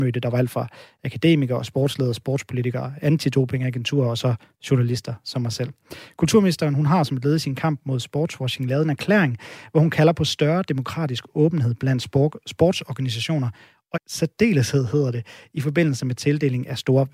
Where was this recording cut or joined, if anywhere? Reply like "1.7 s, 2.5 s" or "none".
13.9 s